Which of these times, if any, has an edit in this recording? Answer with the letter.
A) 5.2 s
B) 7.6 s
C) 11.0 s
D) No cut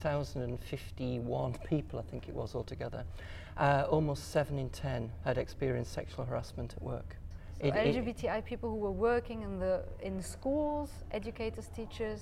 A